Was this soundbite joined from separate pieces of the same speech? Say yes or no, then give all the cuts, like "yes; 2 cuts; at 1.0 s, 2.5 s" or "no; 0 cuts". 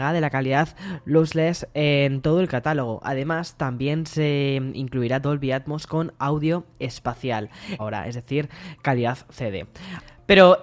yes; 1 cut; at 7.8 s